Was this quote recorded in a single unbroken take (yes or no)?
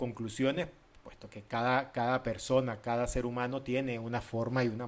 yes